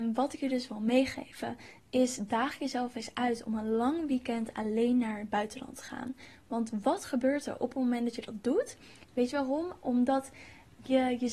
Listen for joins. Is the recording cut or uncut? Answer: cut